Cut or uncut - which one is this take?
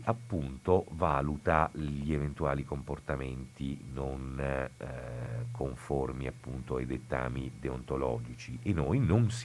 uncut